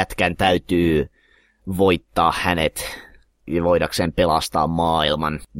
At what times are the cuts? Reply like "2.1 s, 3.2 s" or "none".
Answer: none